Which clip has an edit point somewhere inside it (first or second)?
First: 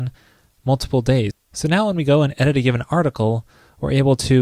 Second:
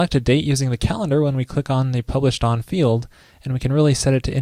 first